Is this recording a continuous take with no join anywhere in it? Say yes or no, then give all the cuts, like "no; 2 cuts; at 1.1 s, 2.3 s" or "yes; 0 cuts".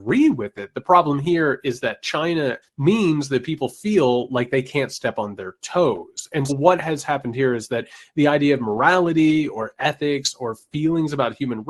no; 2 cuts; at 2.6 s, 6.5 s